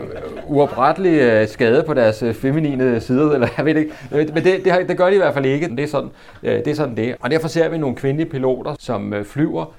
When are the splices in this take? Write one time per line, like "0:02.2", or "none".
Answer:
0:05.7
0:07.2
0:08.8